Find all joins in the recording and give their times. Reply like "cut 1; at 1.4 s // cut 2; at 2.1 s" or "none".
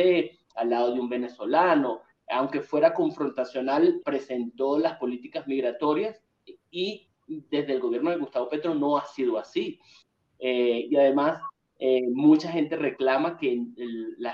cut 1; at 4.0 s

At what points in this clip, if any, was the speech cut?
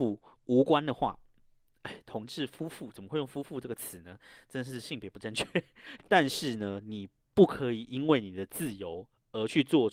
cut 1; at 6.0 s

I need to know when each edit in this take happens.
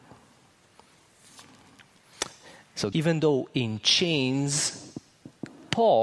cut 1; at 2.9 s

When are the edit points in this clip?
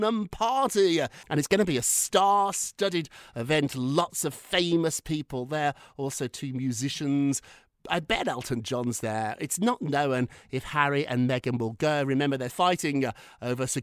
cut 1; at 12.5 s

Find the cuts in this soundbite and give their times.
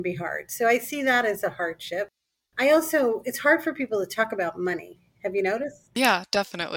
none

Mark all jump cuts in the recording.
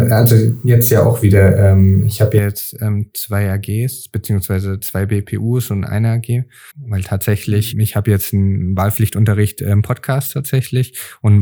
cut 1; at 6.7 s // cut 2; at 7.7 s

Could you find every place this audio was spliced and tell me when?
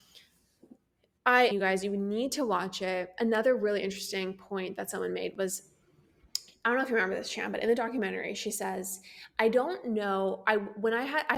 cut 1; at 1.5 s

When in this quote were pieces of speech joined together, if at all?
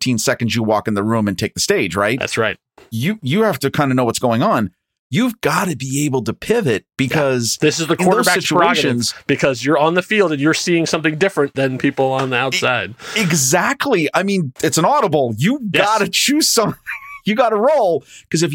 none

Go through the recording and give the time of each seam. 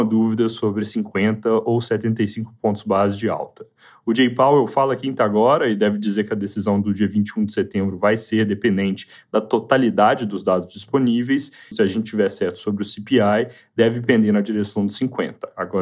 cut 1; at 11.7 s

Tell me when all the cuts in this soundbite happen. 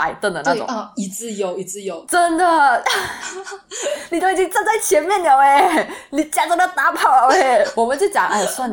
none

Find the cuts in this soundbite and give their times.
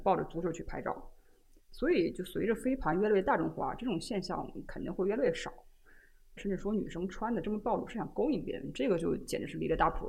cut 1; at 6.4 s

